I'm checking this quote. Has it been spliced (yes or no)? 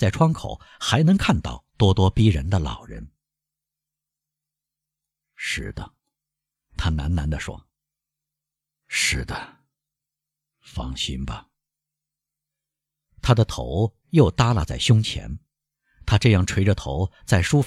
no